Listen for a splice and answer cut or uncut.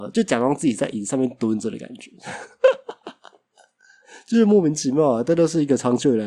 uncut